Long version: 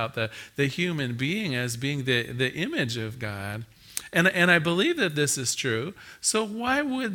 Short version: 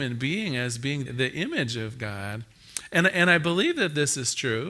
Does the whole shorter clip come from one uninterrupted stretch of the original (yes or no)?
no